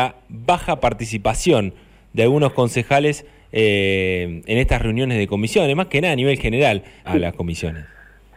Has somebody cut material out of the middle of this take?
yes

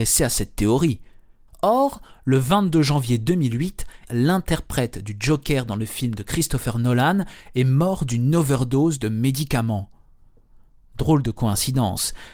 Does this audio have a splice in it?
yes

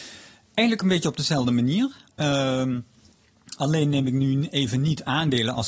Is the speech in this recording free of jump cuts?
yes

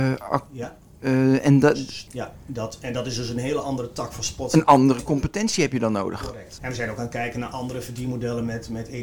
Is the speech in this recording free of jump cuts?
no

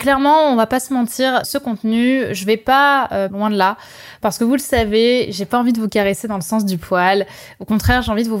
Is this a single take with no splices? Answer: no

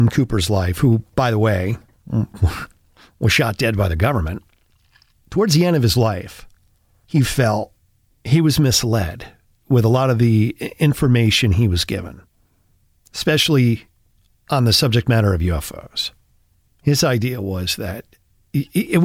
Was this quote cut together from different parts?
no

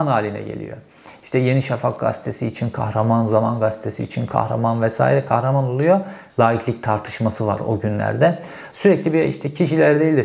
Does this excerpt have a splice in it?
yes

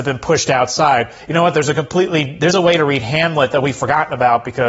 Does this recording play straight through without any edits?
yes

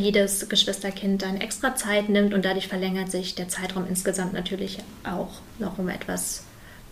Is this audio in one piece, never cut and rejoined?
yes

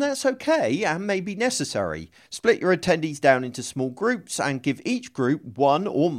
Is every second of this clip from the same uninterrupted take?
no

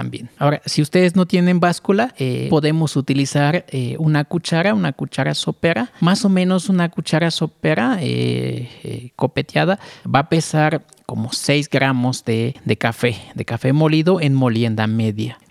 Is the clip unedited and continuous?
yes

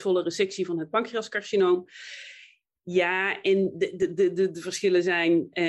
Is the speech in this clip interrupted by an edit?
no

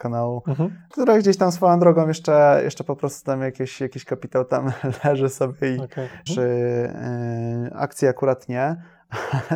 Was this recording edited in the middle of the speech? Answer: yes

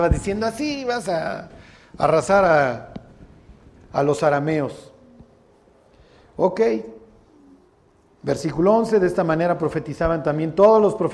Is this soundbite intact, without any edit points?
yes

